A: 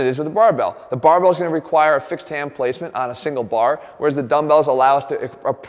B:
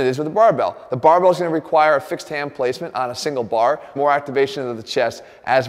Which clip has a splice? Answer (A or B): B